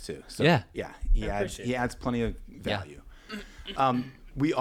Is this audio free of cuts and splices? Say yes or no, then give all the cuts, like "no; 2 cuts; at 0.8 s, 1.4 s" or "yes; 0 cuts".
yes; 0 cuts